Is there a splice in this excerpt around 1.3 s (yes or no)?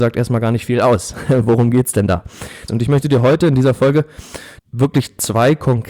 no